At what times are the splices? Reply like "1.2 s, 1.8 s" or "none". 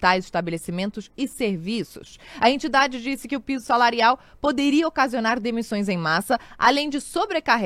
none